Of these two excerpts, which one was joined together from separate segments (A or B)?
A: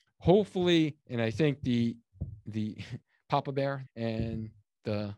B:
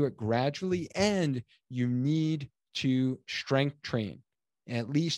A